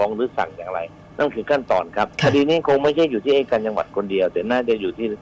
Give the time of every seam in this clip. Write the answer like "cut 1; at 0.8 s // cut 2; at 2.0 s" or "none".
cut 1; at 2.1 s